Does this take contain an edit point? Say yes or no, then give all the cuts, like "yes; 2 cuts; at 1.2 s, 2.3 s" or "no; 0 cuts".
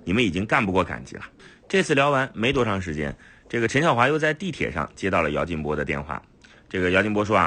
no; 0 cuts